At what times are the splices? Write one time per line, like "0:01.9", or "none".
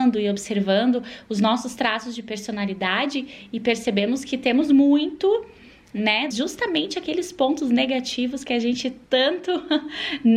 0:06.3

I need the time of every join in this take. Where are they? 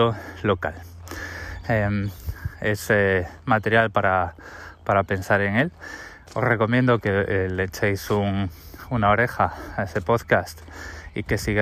0:01.6

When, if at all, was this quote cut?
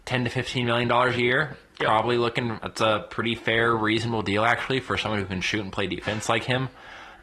0:02.6

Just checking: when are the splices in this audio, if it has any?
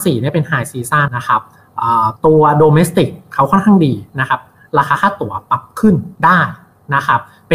0:01.1
0:02.2
0:06.2

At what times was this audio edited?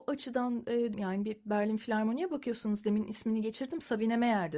0:00.9

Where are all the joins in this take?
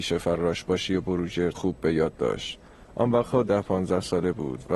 0:01.5

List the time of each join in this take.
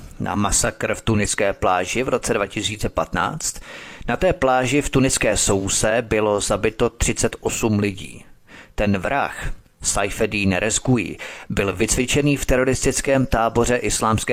none

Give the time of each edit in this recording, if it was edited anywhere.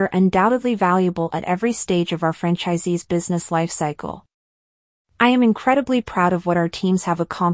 none

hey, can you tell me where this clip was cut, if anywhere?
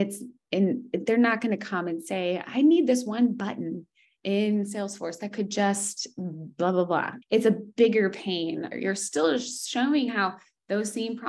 0:07.2
0:08.7

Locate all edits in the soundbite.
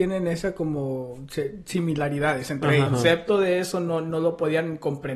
0:02.9

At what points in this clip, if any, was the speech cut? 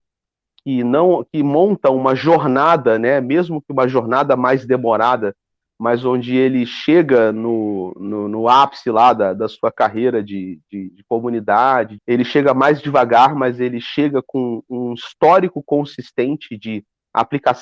0:12.0

